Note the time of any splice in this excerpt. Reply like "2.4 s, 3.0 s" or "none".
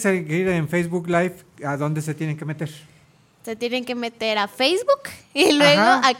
none